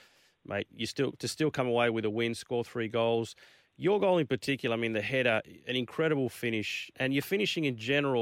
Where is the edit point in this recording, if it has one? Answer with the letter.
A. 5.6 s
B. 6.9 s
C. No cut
B